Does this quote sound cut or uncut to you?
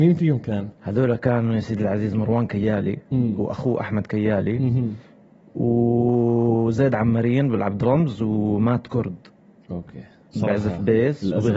uncut